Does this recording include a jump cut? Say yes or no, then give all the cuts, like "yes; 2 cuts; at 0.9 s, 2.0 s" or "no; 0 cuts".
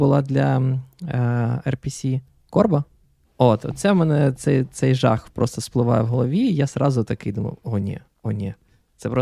yes; 1 cut; at 3.2 s